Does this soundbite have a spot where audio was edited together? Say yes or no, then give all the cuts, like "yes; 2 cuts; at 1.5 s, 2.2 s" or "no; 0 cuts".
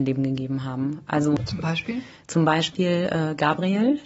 no; 0 cuts